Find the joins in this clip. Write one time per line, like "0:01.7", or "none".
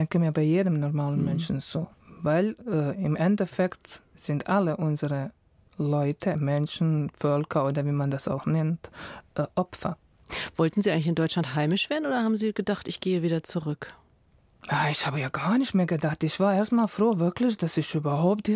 none